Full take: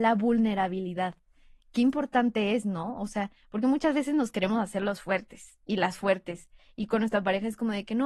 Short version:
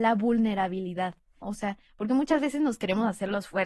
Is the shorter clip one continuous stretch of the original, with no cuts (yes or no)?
no